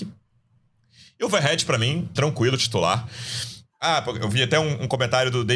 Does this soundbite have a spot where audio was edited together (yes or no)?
yes